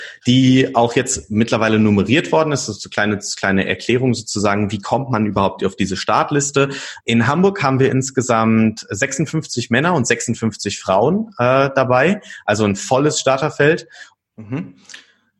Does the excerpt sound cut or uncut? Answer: cut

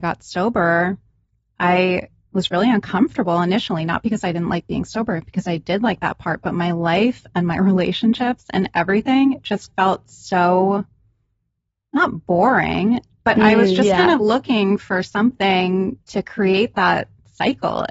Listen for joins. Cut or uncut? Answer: uncut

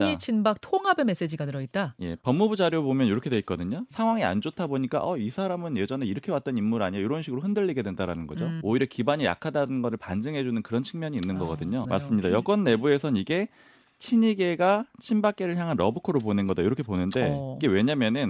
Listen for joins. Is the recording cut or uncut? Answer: cut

